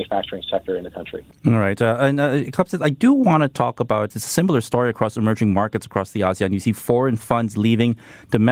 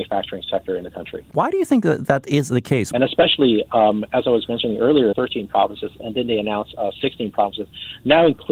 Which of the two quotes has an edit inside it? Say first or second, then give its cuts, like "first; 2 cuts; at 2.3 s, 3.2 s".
second; 3 cuts; at 1.3 s, 2.9 s, 5.1 s